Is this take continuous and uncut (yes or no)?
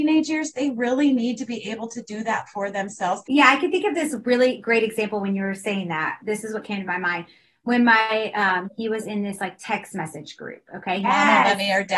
no